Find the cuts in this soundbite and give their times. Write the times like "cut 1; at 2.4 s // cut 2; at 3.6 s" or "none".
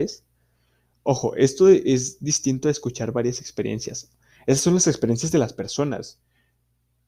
none